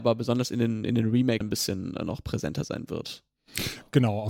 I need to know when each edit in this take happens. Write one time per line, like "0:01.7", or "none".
0:01.4